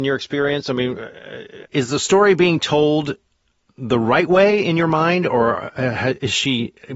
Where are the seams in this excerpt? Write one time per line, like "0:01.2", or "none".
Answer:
0:01.6